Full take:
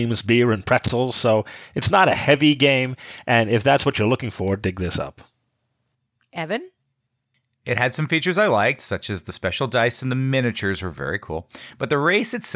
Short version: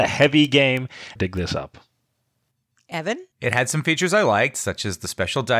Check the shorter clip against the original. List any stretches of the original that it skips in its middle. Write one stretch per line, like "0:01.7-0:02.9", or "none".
0:03.2-0:04.6
0:06.8-0:07.6